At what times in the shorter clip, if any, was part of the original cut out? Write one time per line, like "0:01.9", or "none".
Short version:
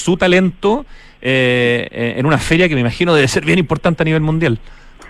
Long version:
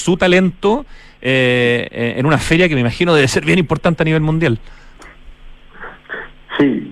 none